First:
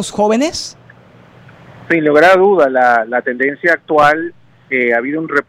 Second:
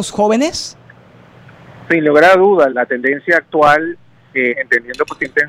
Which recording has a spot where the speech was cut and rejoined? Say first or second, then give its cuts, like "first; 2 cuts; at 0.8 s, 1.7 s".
second; 2 cuts; at 2.7 s, 4.5 s